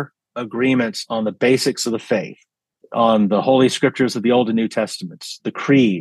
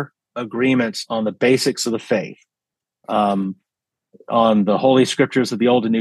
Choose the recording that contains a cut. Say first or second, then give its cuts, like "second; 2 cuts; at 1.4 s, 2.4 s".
first; 1 cut; at 2.8 s